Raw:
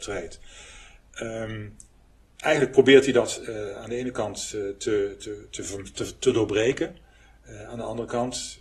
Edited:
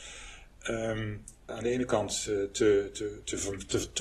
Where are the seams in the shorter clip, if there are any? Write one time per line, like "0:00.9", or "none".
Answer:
0:01.5

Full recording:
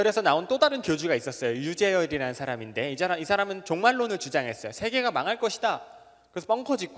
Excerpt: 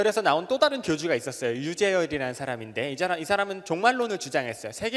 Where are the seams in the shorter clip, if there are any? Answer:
none

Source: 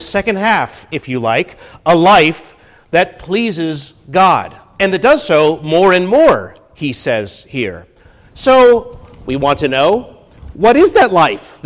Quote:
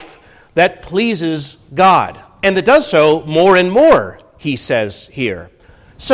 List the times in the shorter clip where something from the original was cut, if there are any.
none

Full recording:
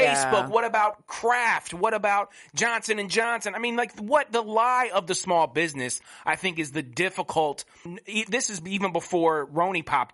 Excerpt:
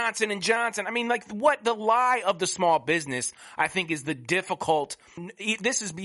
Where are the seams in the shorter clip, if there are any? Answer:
none

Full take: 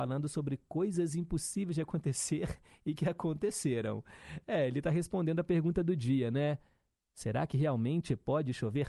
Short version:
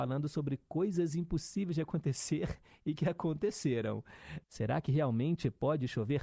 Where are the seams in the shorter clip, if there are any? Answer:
0:04.4

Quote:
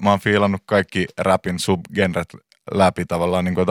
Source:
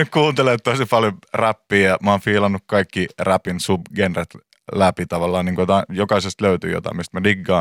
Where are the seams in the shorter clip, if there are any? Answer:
none

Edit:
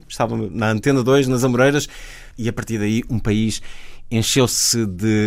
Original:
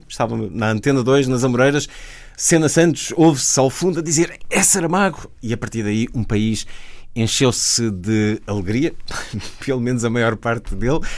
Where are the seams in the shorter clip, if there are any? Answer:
0:02.3

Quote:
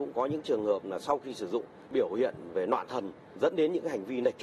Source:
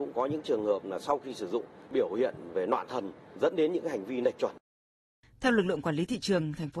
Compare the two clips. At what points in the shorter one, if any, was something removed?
none

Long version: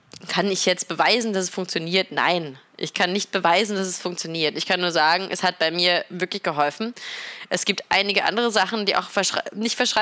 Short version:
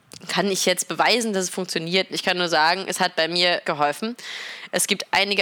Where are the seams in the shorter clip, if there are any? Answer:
0:02.1
0:03.6

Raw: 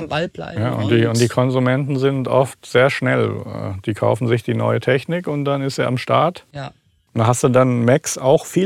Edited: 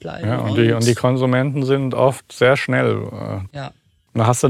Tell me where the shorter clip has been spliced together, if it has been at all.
0:03.5

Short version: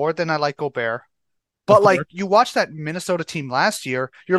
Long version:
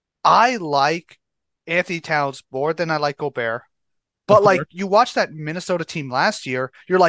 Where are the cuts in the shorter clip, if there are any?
none

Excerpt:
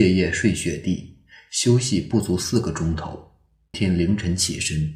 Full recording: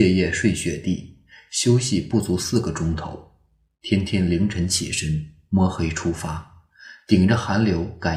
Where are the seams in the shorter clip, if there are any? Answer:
0:03.7

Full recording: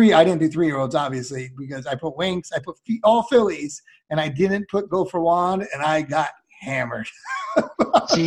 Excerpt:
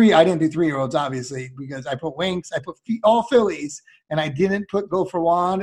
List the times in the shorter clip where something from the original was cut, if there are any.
none

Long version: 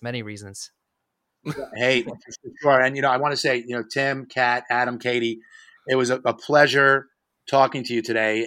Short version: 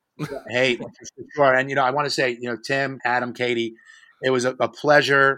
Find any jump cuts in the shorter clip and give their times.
0:03.0

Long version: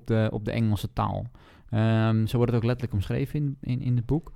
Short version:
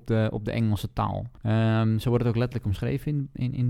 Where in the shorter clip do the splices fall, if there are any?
0:01.4

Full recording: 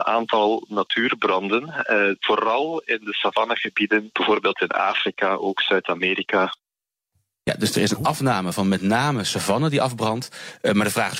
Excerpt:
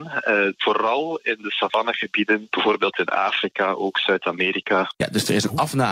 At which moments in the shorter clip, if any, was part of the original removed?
0:04.9

